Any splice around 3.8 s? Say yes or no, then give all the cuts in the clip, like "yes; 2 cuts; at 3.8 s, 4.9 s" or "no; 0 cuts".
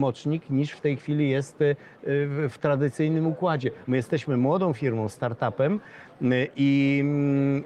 yes; 1 cut; at 3.8 s